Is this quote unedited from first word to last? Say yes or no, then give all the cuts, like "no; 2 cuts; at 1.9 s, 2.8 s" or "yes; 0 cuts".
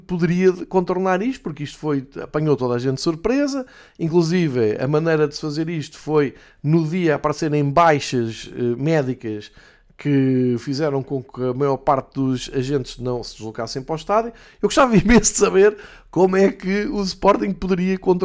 yes; 0 cuts